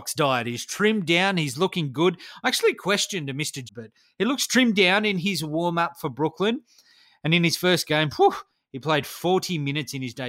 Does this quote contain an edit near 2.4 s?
no; 1 cut; at 3.7 s

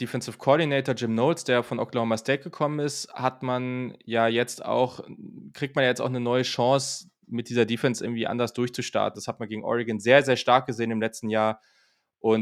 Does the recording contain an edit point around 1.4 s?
no; 1 cut; at 9.1 s

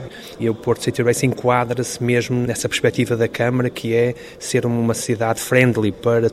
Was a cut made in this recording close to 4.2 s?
no; 0 cuts

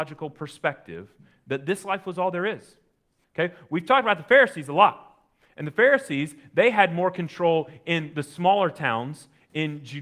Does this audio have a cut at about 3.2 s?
yes; 1 cut; at 3.2 s

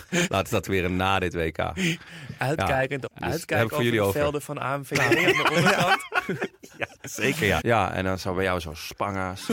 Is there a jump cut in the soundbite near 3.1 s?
yes; 2 cuts; at 3.1 s, 7.6 s

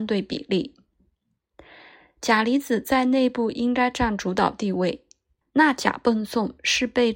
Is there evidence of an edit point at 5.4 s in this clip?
yes; 1 cut; at 5.4 s

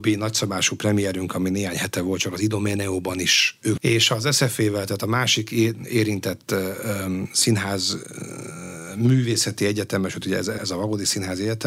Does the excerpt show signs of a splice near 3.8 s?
yes; 2 cuts; at 3.8 s, 10.6 s

